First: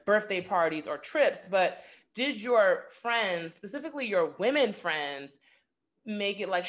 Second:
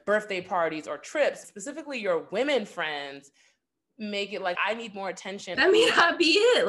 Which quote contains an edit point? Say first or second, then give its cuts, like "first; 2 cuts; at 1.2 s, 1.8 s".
second; 3 cuts; at 1.4 s, 4.6 s, 5.6 s